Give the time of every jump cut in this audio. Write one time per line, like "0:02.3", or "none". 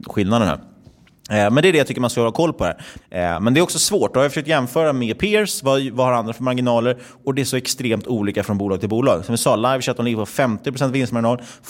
0:03.0

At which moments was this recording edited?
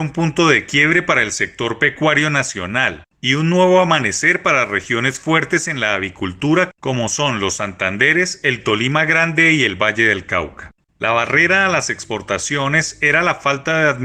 0:10.9

